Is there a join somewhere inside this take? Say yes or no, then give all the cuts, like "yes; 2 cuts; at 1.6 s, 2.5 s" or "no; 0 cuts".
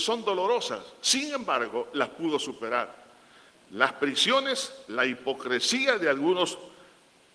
no; 0 cuts